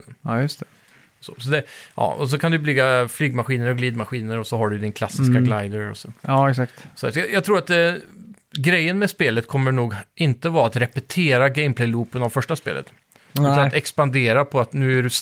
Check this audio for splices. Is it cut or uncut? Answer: uncut